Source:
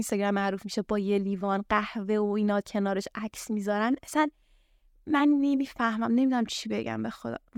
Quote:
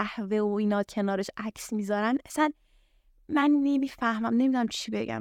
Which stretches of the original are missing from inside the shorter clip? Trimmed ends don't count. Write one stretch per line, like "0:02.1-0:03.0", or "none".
none